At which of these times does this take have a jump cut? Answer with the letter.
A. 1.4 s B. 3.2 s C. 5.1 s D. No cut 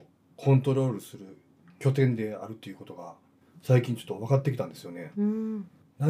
C